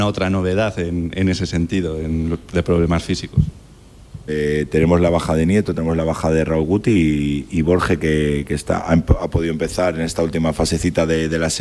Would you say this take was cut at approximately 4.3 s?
yes; 1 cut; at 4.3 s

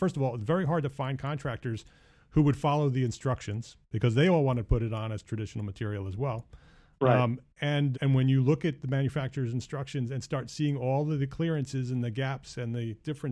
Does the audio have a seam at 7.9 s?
yes; 1 cut; at 7.9 s

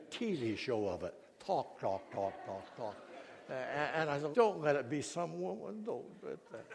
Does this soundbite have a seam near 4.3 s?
yes; 1 cut; at 4.3 s

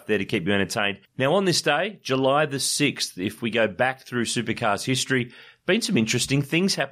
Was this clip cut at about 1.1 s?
yes; 1 cut; at 1.1 s

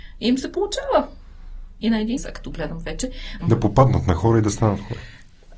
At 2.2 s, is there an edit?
yes; 2 cuts; at 2.2 s, 3.4 s

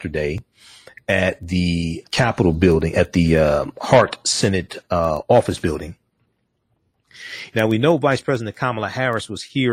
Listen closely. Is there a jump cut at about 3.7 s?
no; 2 cuts; at 2.0 s, 7.5 s

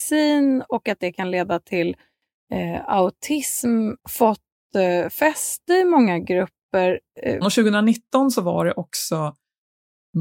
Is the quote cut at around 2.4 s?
no; 2 cuts; at 4.0 s, 7.4 s

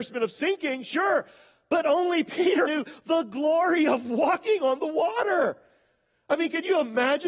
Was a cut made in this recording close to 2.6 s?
yes; 1 cut; at 2.6 s

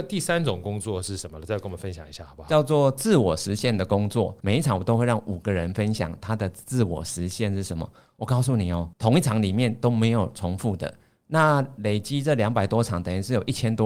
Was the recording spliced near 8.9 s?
yes; 2 cuts; at 4.4 s, 8.9 s

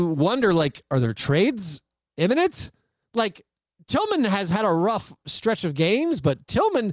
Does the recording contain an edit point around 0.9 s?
no; 1 cut; at 3.0 s

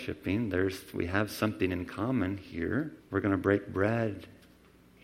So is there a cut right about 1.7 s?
no; 1 cut; at 3.0 s

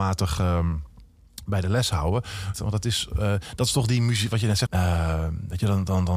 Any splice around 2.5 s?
yes; 2 cuts; at 2.5 s, 4.7 s

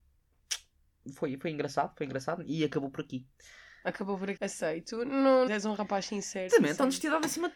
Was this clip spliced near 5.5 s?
yes; 3 cuts; at 4.4 s, 5.5 s, 6.5 s

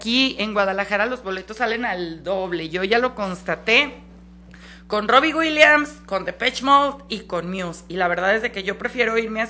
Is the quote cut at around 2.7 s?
no; 0 cuts

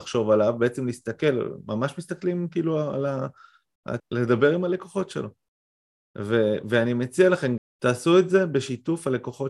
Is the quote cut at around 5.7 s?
no; 2 cuts; at 4.0 s, 7.6 s

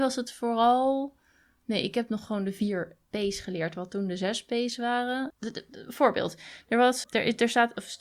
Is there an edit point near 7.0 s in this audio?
yes; 2 cuts; at 5.3 s, 7.0 s

